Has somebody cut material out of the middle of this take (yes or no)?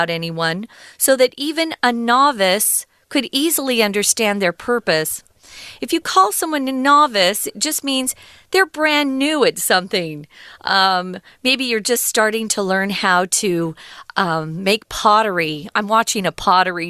no